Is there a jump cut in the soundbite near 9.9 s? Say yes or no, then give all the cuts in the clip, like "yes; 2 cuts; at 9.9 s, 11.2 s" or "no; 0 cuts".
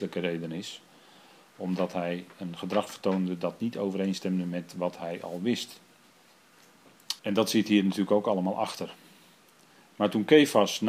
no; 1 cut; at 7.2 s